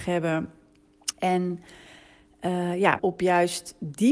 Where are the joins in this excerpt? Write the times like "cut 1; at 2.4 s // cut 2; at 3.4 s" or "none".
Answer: cut 1; at 1.1 s // cut 2; at 3.0 s